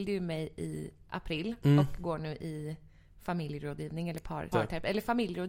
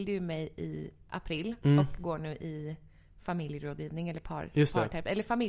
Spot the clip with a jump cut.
first; 1 cut; at 4.5 s

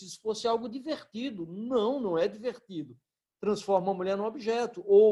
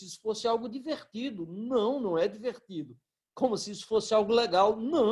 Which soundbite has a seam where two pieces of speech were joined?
first; 1 cut; at 3.3 s

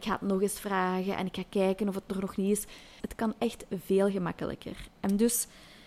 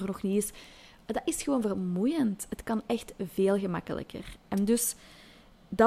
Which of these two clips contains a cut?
first; 1 cut; at 3.0 s

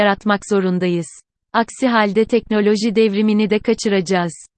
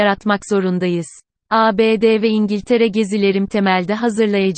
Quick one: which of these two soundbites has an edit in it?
second; 1 cut; at 1.4 s

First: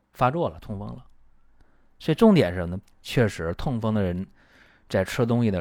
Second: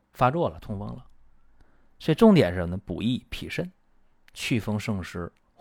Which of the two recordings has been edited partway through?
first; 1 cut; at 2.8 s

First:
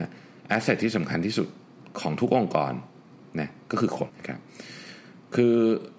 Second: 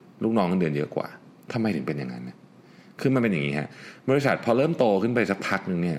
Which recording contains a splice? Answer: first; 1 cut; at 4.1 s

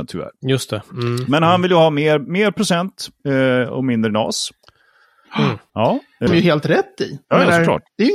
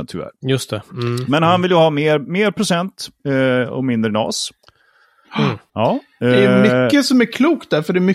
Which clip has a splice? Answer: first; 1 cut; at 6.3 s

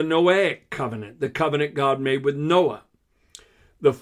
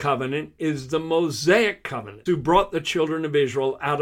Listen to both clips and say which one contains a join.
second; 1 cut; at 2.3 s

